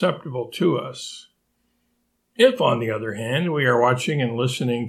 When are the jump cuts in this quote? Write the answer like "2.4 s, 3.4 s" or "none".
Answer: none

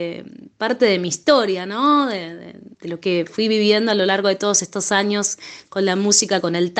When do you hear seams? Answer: 2.7 s

